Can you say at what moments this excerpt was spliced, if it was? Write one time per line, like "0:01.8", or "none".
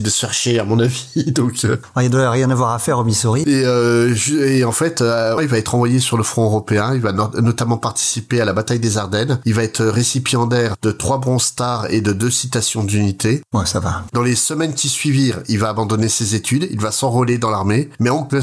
0:03.4
0:05.4
0:14.1